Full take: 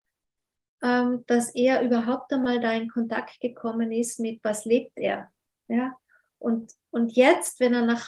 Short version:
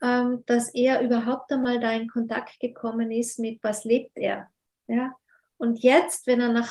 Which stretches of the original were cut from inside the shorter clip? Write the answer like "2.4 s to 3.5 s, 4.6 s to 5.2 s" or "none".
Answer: 6.3 s to 6.8 s